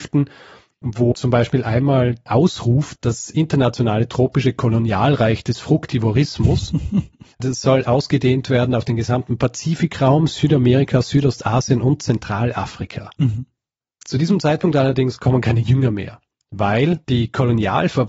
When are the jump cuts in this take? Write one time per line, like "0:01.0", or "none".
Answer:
0:01.1